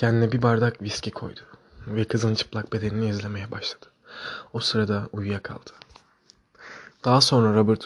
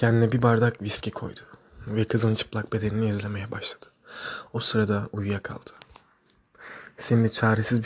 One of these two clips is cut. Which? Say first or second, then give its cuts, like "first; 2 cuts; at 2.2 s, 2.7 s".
first; 1 cut; at 6.9 s